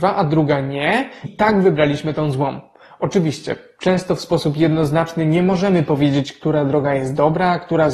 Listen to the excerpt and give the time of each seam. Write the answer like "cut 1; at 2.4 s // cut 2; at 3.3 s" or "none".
cut 1; at 1.2 s